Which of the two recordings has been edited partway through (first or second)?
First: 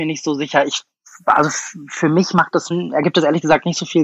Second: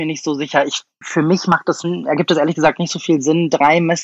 second